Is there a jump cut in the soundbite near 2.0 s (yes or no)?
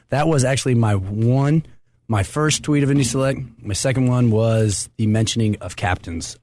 no